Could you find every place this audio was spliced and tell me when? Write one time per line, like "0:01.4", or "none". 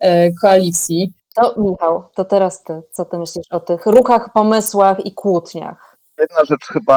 none